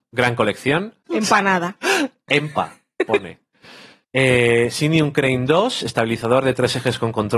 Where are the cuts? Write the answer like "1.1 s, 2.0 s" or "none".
1.1 s